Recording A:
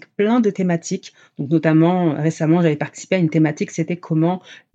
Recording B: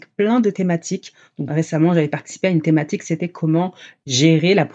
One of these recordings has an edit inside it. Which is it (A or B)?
B